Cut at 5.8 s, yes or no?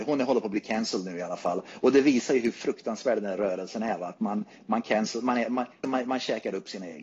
yes